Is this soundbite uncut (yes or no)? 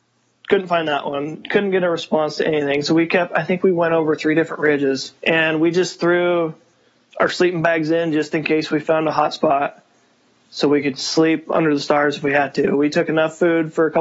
no